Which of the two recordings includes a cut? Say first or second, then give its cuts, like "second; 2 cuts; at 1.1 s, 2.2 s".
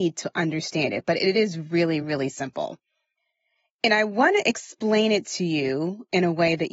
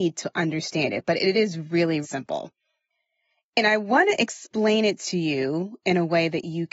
second; 1 cut; at 2.0 s